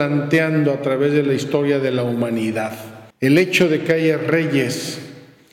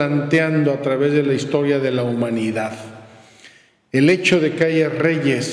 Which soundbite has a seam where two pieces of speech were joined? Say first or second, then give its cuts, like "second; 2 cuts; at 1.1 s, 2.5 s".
first; 1 cut; at 3.1 s